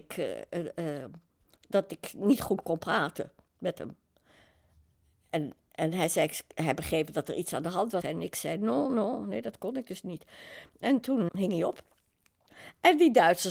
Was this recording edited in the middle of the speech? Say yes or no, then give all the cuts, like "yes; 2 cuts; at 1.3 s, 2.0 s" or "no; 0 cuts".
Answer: yes; 2 cuts; at 8.0 s, 11.3 s